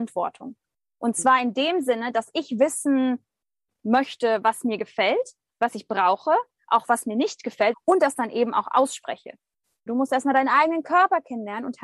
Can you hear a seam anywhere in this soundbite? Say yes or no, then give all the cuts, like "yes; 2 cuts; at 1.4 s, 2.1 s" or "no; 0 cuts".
yes; 2 cuts; at 7.7 s, 9.9 s